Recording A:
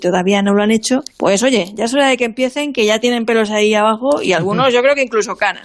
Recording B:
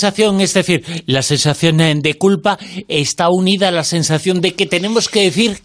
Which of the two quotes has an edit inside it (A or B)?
A